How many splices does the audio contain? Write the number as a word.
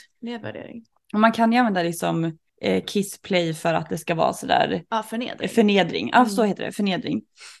one